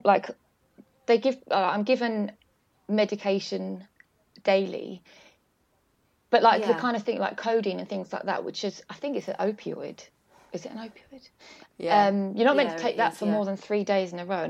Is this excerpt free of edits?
yes; 0 cuts

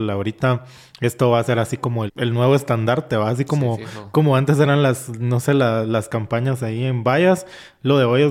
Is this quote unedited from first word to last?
no; 1 cut; at 2.1 s

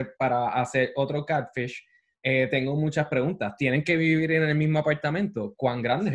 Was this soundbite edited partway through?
no; 0 cuts

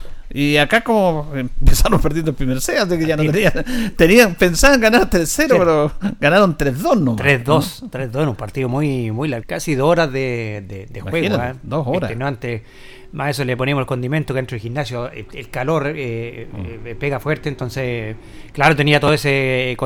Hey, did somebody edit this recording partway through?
yes; 1 cut; at 9.4 s

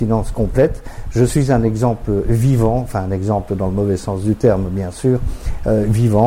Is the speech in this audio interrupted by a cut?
no; 0 cuts

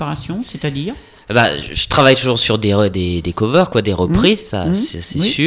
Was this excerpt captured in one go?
yes; 0 cuts

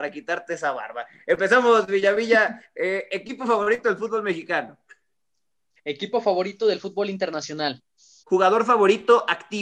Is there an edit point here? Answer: yes; 2 cuts; at 5.8 s, 8.2 s

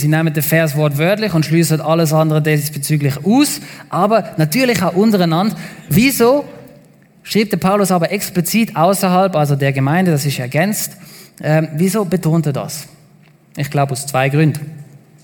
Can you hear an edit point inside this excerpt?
no; 0 cuts

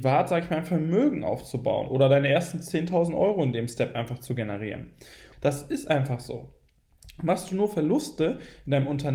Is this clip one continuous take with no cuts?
no; 1 cut; at 5.3 s

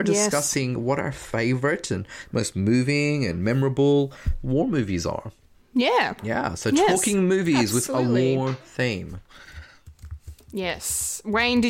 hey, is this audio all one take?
yes; 0 cuts

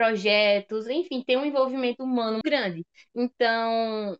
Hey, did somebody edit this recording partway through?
yes; 1 cut; at 2.4 s

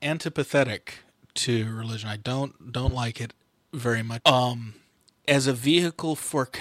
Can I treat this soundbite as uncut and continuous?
no; 1 cut; at 4.2 s

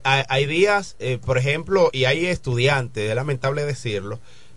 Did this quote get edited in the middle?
no; 0 cuts

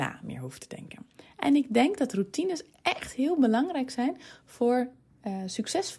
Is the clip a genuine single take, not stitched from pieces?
yes; 0 cuts

